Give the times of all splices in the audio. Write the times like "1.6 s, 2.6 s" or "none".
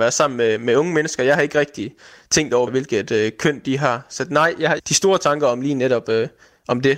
2.7 s, 4.8 s